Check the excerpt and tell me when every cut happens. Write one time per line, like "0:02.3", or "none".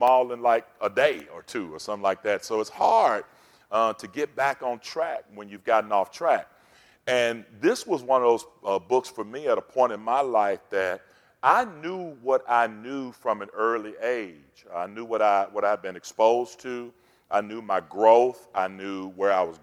none

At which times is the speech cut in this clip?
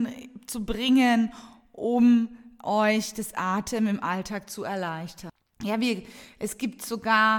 none

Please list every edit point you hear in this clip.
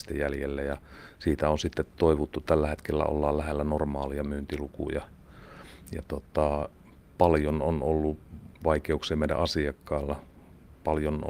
0:08.5

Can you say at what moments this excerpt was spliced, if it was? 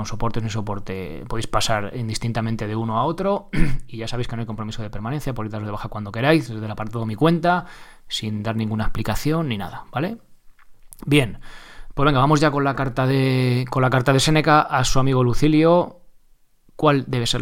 none

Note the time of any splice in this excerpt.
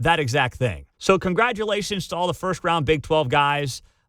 0:00.9

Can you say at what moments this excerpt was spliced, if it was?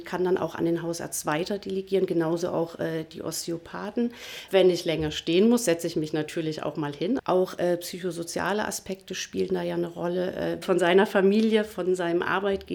0:04.5
0:07.2
0:10.6

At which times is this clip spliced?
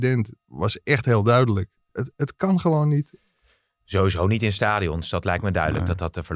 0:01.9

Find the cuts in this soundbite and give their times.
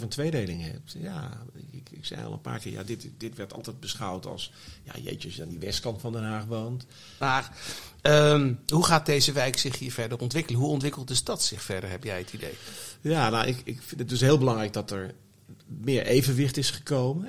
0:07.2

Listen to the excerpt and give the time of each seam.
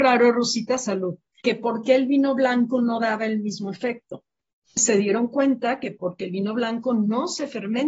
0:01.4
0:04.8

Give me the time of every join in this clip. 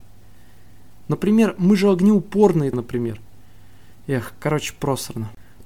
0:01.1
0:02.7

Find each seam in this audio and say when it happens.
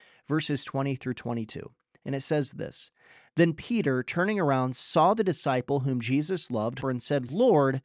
0:06.8

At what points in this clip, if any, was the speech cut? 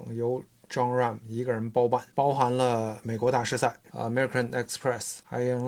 0:03.9

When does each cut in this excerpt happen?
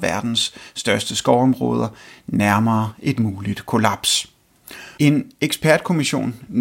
0:05.0

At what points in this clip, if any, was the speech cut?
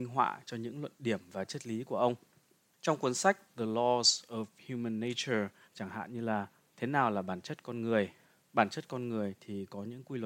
0:05.6

